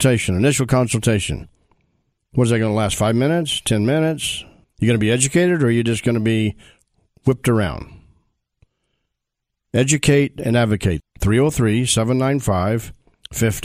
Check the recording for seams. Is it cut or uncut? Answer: cut